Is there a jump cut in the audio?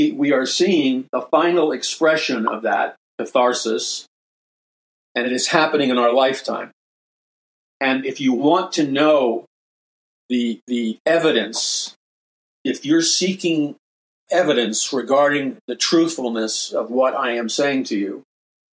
no; 0 cuts

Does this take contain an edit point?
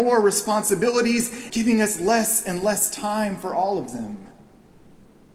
yes; 1 cut; at 1.5 s

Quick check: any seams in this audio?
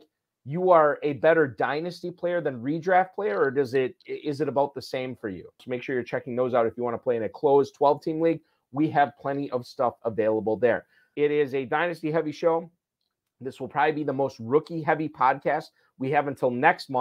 yes; 2 cuts; at 5.6 s, 11.2 s

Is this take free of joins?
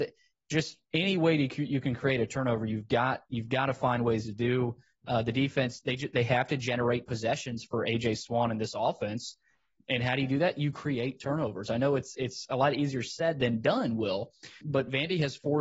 no; 1 cut; at 14.6 s

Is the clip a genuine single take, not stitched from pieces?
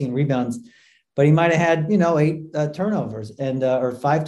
yes; 0 cuts

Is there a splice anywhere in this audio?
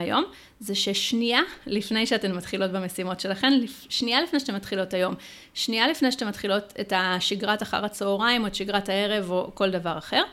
no; 0 cuts

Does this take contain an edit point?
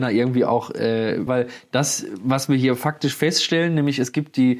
yes; 1 cut; at 1.3 s

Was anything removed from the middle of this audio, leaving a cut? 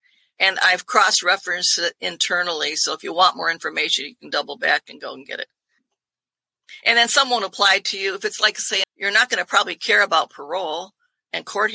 yes; 1 cut; at 8.8 s

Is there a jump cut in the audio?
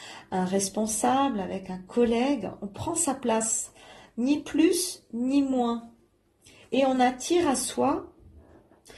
no; 0 cuts

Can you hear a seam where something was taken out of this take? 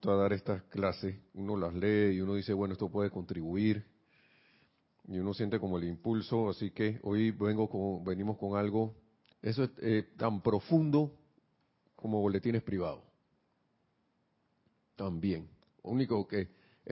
yes; 1 cut; at 9.3 s

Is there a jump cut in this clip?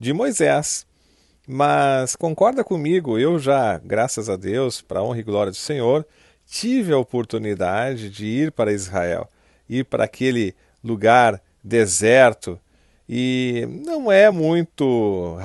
no; 0 cuts

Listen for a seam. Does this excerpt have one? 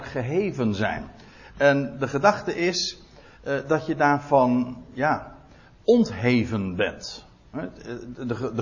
no; 0 cuts

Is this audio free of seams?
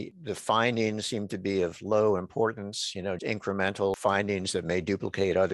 no; 1 cut; at 3.2 s

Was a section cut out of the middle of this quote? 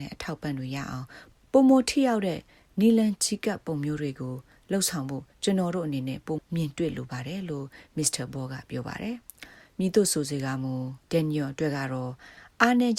yes; 3 cuts; at 6.4 s, 9.2 s, 11.0 s

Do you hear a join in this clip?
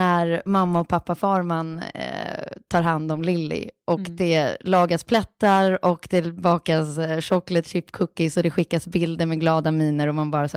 no; 0 cuts

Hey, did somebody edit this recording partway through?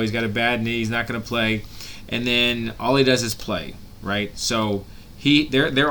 no; 0 cuts

